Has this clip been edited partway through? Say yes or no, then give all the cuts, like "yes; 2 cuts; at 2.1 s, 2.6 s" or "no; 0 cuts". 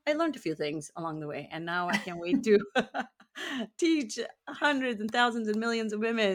no; 0 cuts